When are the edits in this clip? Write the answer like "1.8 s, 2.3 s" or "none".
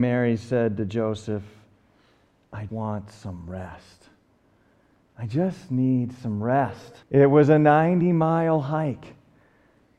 2.7 s, 7.0 s